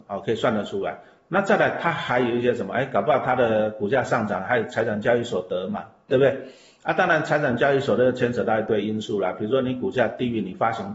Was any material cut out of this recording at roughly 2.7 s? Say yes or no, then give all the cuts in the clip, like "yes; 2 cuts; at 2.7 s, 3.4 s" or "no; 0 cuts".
no; 0 cuts